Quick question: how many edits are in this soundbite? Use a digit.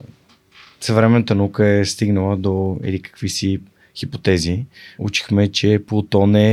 1